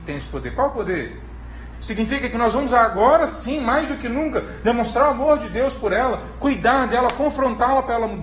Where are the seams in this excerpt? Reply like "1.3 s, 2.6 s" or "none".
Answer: 1.7 s